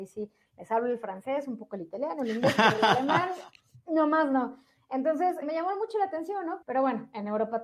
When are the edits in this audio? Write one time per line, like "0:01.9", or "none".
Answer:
0:05.4
0:06.6